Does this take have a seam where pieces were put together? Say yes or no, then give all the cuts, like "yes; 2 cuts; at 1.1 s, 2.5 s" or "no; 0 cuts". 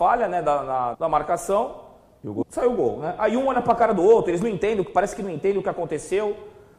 yes; 2 cuts; at 0.9 s, 2.4 s